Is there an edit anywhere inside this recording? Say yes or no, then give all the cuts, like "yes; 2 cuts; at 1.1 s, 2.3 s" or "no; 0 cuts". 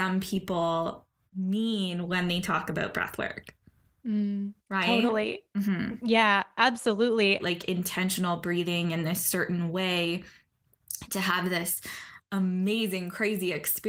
yes; 2 cuts; at 4.6 s, 7.4 s